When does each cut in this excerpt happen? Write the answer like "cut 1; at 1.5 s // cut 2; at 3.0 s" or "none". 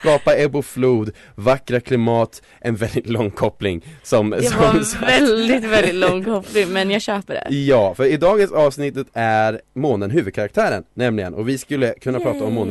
cut 1; at 9.6 s